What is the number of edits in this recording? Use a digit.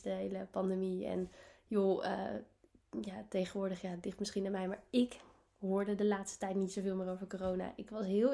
0